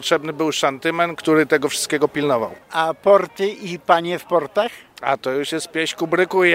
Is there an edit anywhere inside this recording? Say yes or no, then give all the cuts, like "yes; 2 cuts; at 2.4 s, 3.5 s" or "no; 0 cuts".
no; 0 cuts